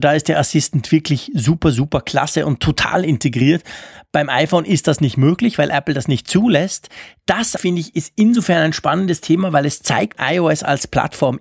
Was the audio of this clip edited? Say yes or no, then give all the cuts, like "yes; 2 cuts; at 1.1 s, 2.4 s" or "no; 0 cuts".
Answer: yes; 2 cuts; at 7.6 s, 10.1 s